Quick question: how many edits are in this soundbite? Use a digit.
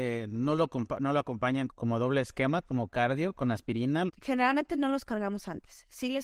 2